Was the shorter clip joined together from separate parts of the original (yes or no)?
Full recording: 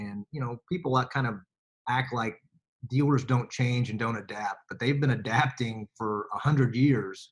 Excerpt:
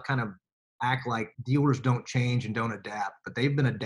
yes